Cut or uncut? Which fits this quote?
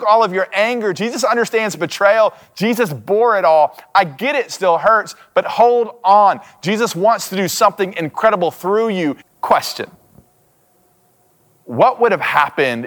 cut